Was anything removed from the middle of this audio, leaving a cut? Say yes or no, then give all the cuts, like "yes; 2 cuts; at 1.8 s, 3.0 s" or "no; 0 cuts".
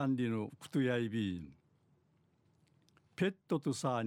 no; 0 cuts